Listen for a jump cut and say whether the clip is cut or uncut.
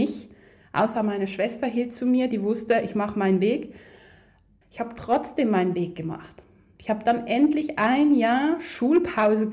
cut